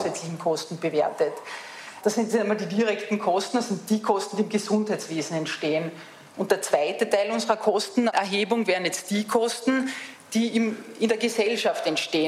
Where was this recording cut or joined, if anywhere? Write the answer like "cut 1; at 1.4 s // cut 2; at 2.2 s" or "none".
none